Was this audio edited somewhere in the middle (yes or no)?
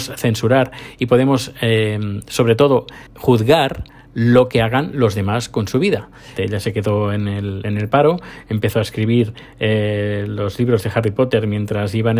yes